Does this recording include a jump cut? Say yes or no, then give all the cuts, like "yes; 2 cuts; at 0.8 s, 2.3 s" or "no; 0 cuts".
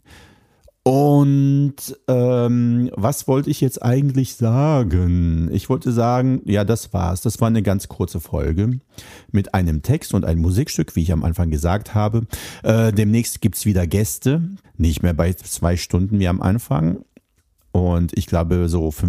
yes; 1 cut; at 14.6 s